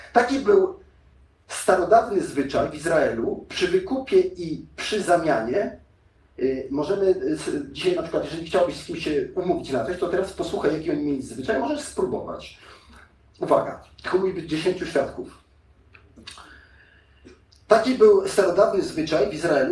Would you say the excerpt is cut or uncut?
uncut